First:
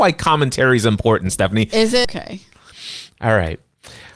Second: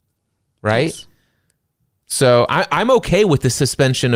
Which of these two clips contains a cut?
first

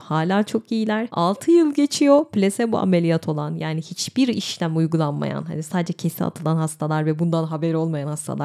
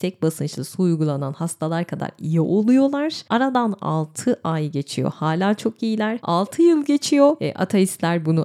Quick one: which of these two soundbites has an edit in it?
second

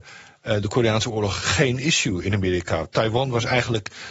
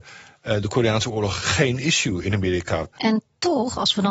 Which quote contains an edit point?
second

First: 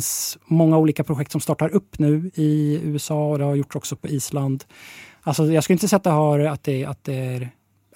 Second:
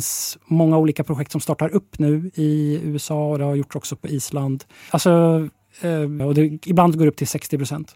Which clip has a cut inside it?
second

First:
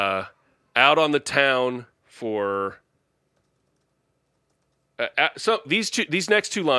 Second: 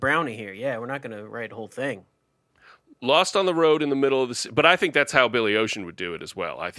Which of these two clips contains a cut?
first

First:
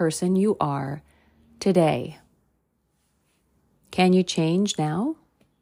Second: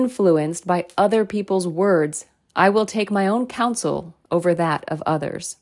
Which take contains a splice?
second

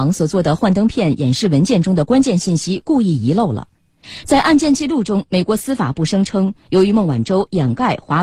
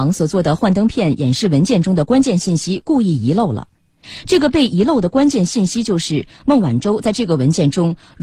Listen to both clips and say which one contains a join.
first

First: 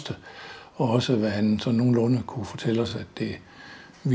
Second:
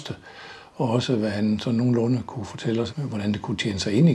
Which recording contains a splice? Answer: second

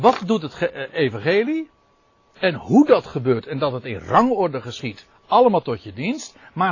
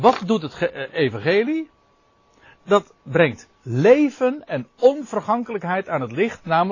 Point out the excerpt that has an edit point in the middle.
first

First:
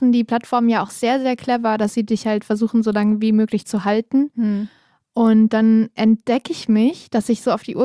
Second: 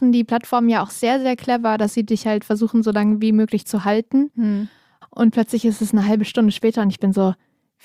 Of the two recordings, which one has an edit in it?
second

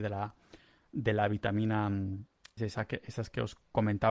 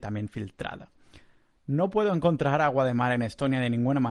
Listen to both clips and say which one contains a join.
first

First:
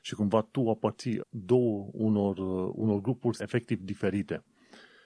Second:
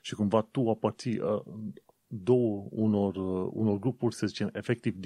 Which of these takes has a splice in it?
first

